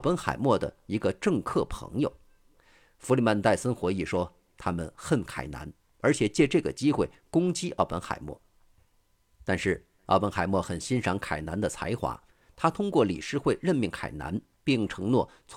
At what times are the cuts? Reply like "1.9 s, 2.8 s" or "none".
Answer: none